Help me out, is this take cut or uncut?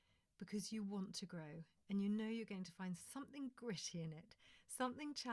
uncut